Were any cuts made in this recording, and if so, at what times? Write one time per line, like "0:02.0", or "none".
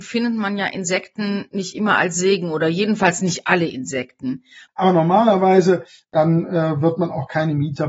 0:04.7
0:06.0